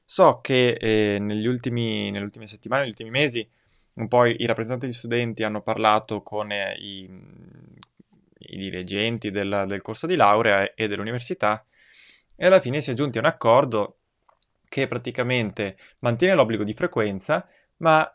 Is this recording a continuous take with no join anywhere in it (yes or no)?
yes